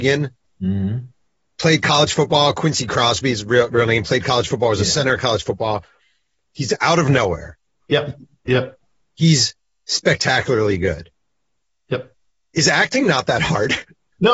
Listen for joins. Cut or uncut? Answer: cut